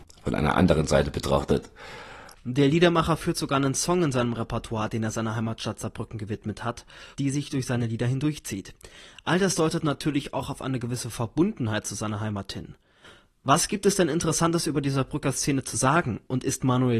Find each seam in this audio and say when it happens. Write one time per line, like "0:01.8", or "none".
0:02.3
0:07.1